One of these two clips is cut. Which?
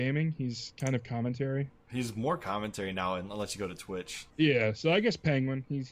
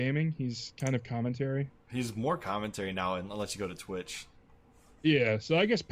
first; 1 cut; at 4.3 s

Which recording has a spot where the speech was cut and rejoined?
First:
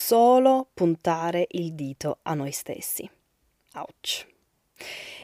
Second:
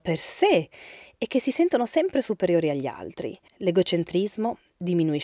second; 1 cut; at 3.5 s

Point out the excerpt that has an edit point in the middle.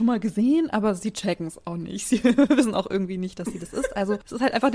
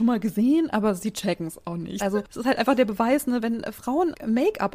second; 1 cut; at 2.0 s

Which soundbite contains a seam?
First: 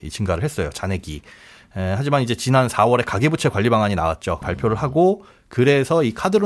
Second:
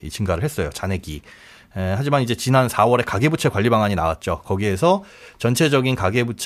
first; 1 cut; at 4.4 s

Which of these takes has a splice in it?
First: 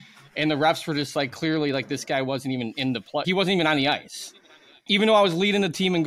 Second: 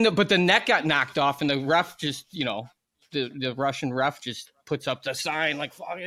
first; 2 cuts; at 3.2 s, 4.9 s

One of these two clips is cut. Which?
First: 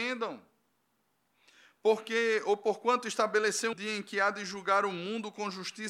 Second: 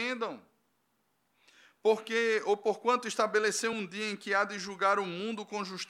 first; 1 cut; at 3.7 s

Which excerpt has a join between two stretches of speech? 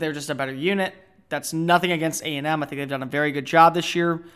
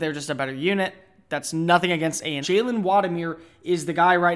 second; 1 cut; at 2.4 s

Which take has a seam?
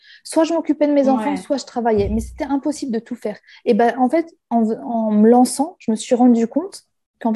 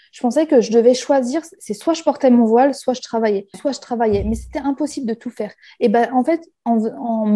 second; 1 cut; at 3.5 s

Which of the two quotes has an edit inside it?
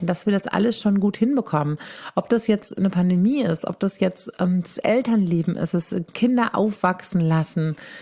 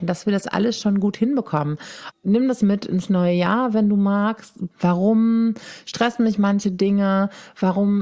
second; 2 cuts; at 2.1 s, 4.7 s

